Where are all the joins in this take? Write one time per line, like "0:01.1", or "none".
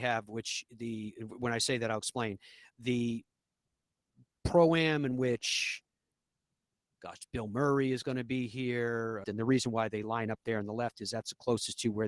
0:02.7
0:09.2